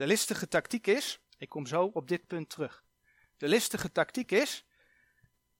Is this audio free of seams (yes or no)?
no